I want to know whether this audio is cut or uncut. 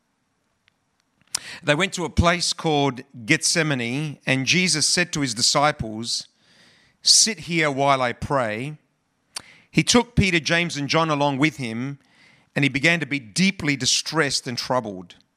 uncut